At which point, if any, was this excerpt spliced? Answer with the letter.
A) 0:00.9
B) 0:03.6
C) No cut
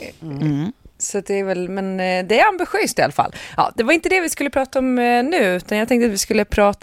C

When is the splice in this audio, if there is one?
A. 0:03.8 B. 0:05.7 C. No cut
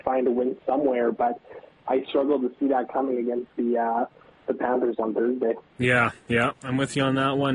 C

